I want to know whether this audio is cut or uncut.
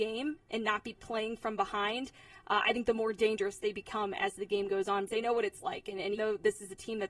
cut